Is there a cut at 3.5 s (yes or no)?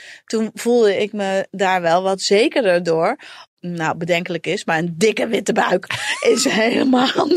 yes